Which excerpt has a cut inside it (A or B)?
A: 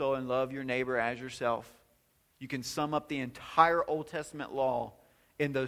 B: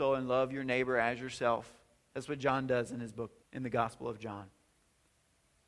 B